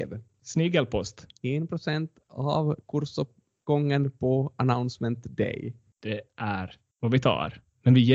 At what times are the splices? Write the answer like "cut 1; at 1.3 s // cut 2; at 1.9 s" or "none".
cut 1; at 1.4 s